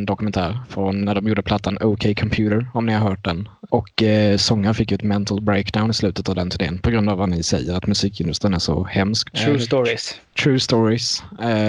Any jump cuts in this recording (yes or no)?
yes